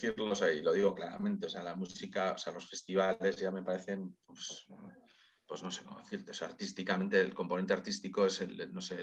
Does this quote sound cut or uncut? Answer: uncut